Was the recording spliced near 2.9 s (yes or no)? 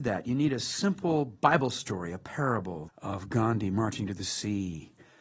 yes